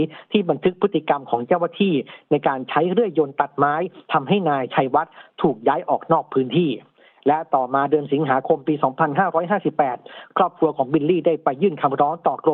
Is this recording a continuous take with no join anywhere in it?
yes; 0 cuts

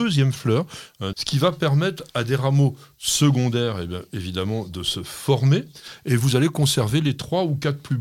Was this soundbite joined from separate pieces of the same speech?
yes; 1 cut; at 1.1 s

